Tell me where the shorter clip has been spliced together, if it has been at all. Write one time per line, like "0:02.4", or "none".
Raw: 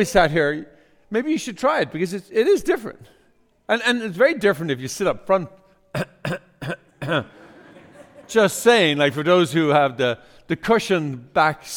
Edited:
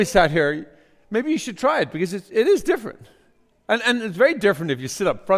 none